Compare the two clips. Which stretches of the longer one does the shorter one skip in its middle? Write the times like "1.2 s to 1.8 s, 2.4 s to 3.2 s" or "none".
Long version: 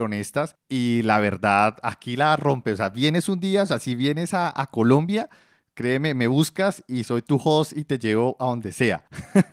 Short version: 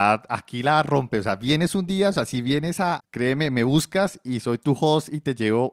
4.5 s to 5.6 s